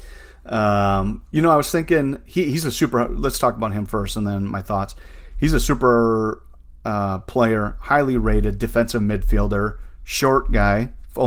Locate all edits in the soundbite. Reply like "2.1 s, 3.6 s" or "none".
none